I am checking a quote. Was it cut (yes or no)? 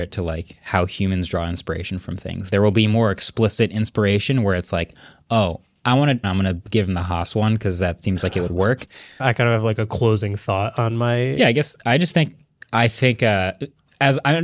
yes